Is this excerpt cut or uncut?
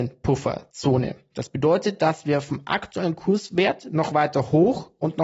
cut